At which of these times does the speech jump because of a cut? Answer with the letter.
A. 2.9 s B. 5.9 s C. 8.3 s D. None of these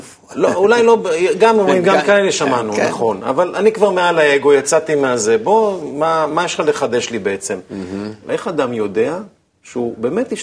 C